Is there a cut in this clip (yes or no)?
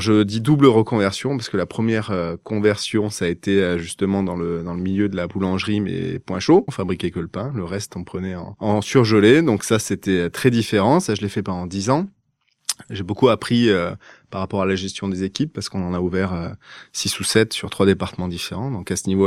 no